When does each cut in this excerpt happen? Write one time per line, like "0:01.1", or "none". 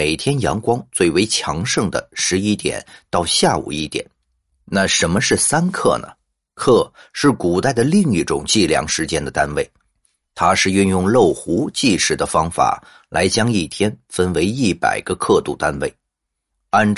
none